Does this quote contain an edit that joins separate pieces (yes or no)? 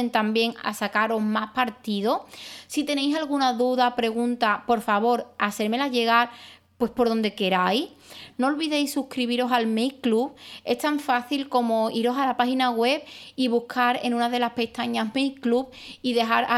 yes